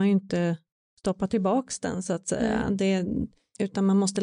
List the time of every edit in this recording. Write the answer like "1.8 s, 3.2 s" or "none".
none